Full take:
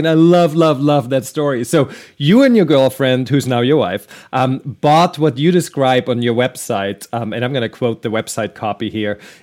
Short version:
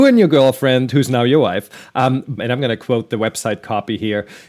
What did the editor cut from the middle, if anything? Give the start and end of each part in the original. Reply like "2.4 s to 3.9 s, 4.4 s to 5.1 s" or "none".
4.7 s to 7.3 s